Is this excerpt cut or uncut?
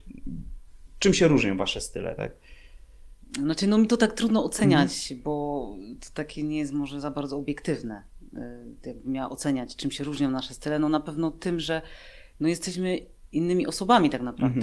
uncut